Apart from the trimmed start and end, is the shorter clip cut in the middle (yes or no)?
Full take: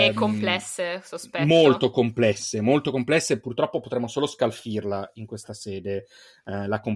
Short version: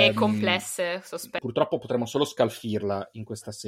yes